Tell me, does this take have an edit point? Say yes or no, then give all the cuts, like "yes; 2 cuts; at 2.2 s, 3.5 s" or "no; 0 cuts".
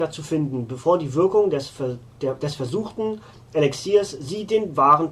no; 0 cuts